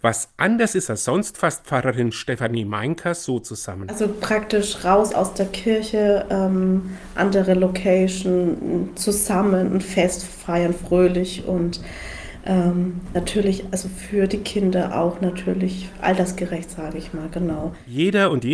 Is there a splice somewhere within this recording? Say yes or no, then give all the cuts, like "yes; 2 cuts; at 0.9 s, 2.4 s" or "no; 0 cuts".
no; 0 cuts